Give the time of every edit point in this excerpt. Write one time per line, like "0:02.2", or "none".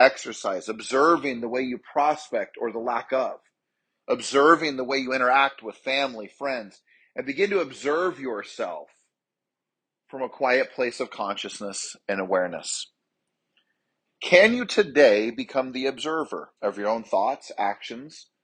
0:14.1
0:16.6

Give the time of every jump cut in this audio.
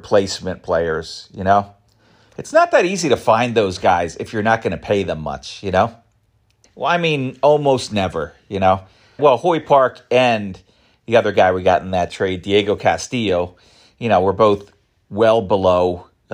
0:06.6
0:09.2

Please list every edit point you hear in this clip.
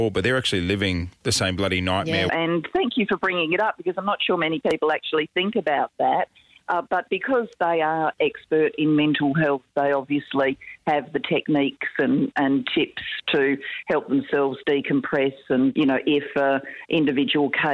0:02.3

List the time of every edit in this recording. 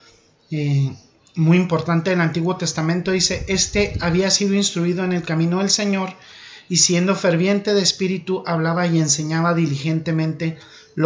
none

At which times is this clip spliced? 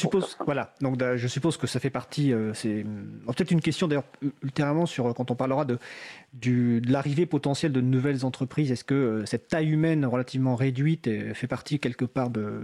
none

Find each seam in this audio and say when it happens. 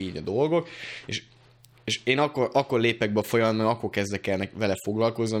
none

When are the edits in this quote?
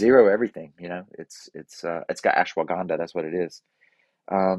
none

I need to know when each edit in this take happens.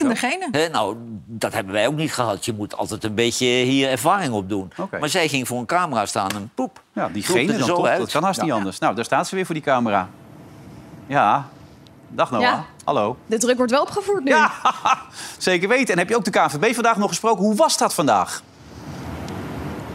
none

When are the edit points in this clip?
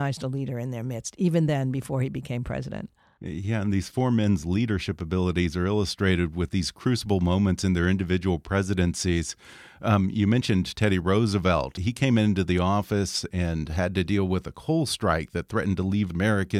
none

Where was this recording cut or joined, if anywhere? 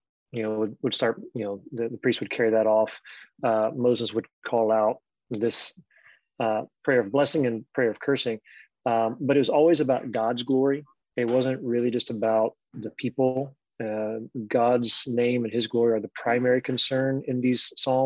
none

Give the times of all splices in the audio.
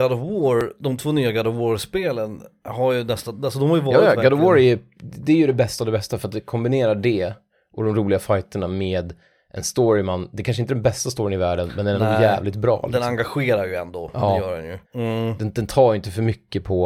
0:14.8

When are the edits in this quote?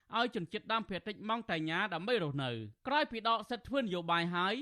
0:02.8

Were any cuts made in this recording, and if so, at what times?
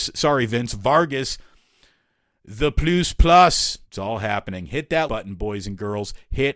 0:03.9
0:05.1

